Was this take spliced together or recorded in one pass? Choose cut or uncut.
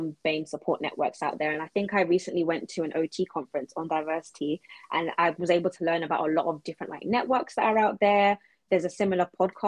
uncut